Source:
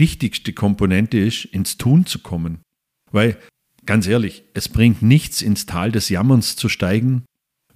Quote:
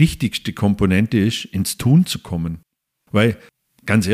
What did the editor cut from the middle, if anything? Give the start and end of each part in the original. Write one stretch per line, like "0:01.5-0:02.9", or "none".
none